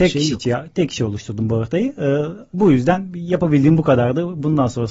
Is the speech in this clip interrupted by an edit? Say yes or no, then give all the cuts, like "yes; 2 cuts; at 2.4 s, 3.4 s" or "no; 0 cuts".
yes; 1 cut; at 2.5 s